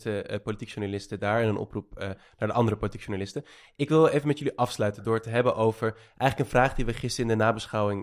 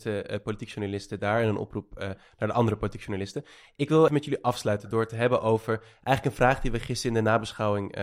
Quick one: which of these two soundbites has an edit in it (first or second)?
second